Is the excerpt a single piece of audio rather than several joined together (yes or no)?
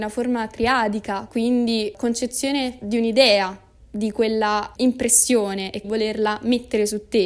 no